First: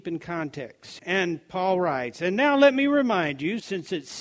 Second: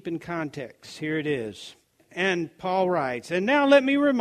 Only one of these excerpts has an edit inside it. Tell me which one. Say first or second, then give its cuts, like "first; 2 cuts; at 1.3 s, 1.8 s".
first; 1 cut; at 1.0 s